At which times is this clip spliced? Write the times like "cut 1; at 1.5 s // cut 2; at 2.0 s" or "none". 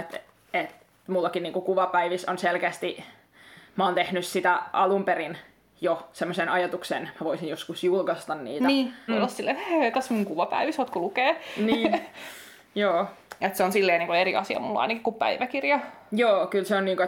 cut 1; at 9.1 s